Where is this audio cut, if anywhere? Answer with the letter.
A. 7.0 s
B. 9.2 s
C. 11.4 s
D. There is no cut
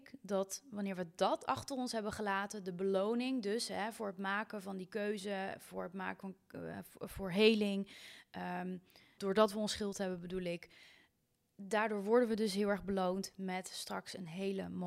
B